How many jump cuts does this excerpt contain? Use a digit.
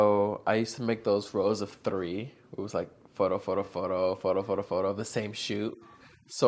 0